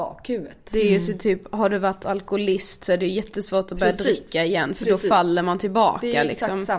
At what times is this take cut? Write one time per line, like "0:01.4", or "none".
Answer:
none